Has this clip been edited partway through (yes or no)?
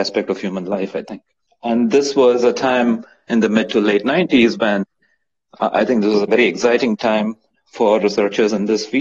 yes